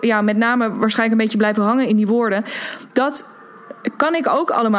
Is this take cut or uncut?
uncut